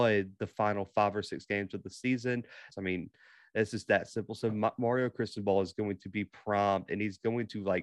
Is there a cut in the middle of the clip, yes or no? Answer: yes